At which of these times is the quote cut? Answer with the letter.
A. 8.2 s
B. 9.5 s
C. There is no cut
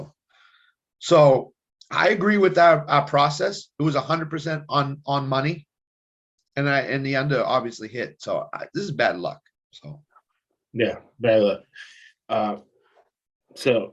B